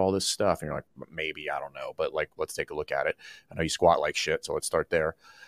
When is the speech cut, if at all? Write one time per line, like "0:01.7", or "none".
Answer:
none